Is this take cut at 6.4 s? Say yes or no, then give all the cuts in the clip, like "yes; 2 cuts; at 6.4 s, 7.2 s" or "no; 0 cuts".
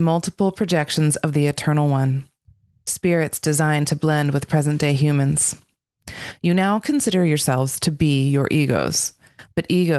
no; 0 cuts